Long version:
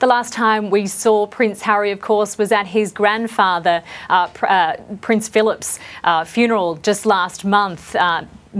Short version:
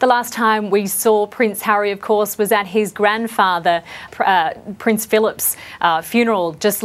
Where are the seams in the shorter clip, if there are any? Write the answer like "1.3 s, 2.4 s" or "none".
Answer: 4.1 s